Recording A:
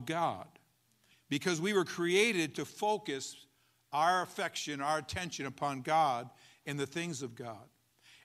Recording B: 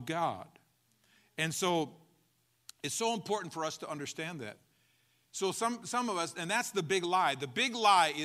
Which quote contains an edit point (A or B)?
A